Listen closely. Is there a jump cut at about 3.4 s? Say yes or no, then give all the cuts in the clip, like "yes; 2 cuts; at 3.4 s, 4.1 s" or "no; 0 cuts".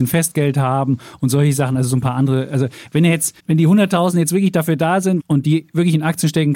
yes; 2 cuts; at 3.4 s, 5.2 s